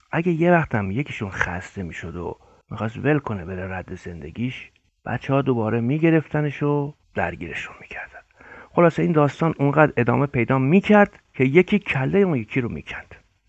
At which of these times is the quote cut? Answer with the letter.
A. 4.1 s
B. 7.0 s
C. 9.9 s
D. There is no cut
B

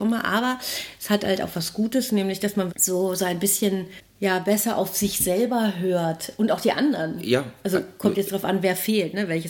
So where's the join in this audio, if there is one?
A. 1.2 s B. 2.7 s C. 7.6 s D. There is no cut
B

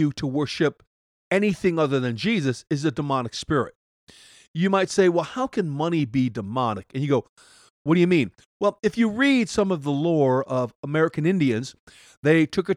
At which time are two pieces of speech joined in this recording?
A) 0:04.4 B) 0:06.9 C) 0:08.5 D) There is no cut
B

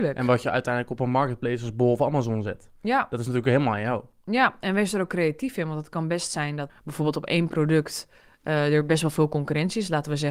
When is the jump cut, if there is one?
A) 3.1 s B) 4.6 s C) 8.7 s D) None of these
D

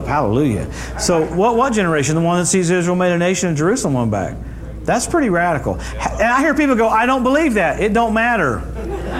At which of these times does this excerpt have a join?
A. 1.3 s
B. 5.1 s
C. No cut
C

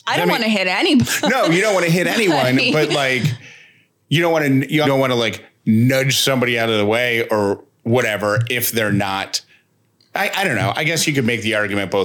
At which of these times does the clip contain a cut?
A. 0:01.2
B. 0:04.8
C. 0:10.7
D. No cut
B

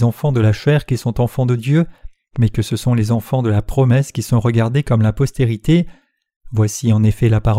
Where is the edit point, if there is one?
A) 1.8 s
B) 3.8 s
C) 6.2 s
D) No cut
D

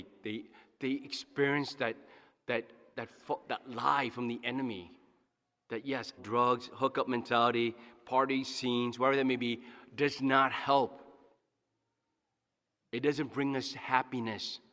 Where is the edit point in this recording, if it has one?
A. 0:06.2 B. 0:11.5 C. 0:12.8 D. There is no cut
A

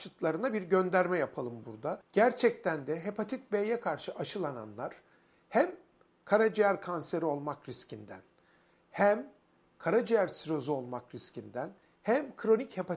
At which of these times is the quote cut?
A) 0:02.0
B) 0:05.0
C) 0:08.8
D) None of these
D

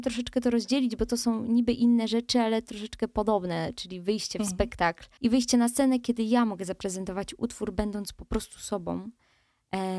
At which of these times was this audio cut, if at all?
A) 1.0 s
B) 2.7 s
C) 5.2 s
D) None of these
C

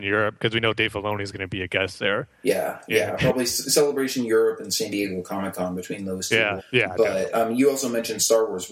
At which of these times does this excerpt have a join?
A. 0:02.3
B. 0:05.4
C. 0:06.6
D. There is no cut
C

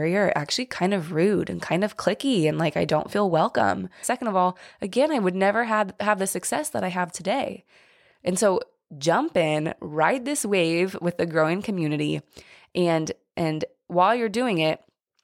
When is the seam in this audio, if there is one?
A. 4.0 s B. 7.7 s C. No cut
A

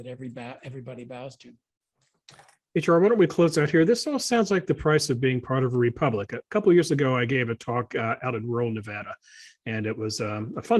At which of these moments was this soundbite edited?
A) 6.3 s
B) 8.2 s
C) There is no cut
C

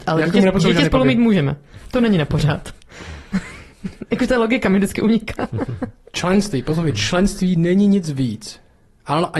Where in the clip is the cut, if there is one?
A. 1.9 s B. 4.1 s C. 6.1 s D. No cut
D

